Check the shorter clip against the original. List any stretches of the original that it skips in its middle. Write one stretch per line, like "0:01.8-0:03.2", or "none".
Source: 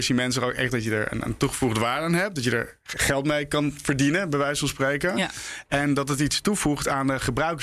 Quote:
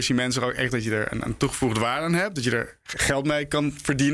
none